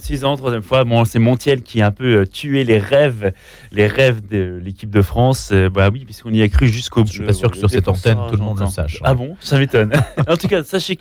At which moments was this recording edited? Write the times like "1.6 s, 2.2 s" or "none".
7.1 s